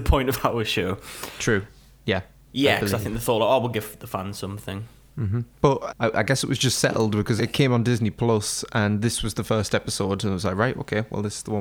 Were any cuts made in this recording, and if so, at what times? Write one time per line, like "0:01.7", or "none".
0:02.5
0:05.9
0:07.4